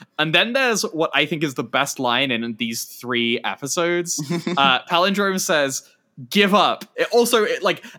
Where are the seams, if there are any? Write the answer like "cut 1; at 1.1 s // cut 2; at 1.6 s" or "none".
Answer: cut 1; at 6.9 s